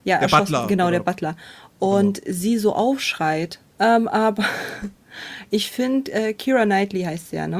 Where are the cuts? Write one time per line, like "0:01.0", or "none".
0:03.7